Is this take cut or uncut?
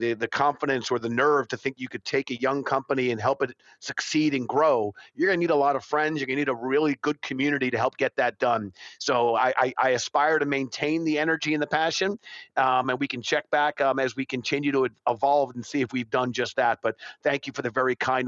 uncut